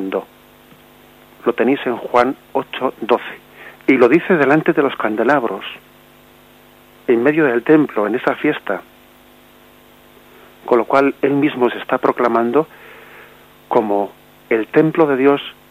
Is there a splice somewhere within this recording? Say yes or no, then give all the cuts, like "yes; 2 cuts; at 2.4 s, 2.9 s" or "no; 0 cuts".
no; 0 cuts